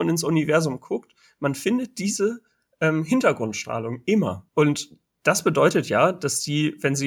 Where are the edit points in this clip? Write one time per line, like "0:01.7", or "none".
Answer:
0:04.5